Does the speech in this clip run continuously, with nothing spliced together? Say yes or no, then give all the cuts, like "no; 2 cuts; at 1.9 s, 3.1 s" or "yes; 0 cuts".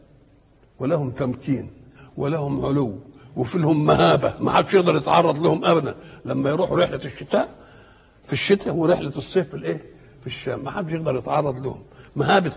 yes; 0 cuts